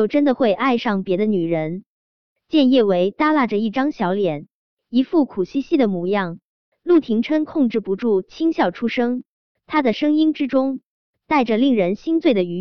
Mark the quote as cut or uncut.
uncut